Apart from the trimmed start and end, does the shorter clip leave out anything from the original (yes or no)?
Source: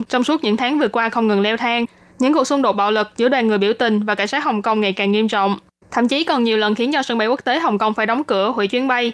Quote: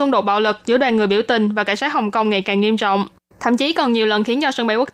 no